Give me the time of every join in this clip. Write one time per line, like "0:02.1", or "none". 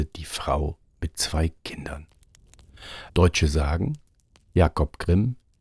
0:03.1